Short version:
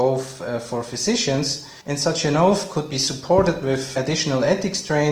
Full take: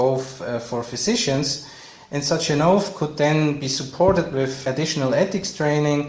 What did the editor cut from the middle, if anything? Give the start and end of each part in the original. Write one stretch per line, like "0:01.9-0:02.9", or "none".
0:01.8-0:02.1
0:03.1-0:03.6